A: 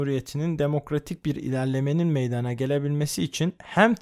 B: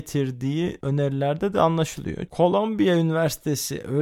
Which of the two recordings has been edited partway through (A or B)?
B